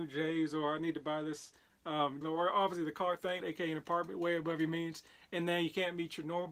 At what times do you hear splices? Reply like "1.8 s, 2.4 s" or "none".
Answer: 2.2 s, 3.4 s